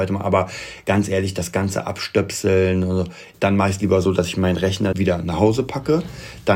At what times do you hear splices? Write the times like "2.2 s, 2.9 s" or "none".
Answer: 3.3 s, 4.9 s